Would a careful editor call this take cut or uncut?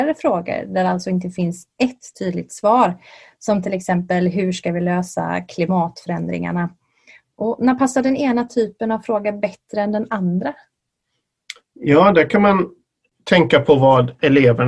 uncut